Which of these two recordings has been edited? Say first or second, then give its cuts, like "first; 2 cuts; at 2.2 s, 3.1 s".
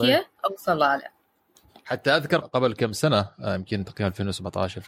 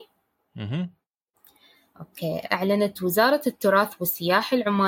first; 1 cut; at 2.4 s